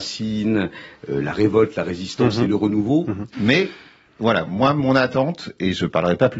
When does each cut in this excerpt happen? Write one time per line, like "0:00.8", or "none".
0:03.3